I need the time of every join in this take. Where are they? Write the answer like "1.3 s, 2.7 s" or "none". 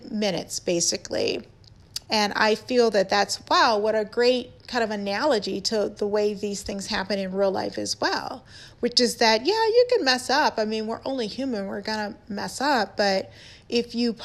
2.0 s